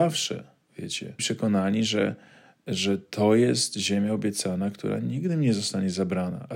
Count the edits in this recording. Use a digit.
0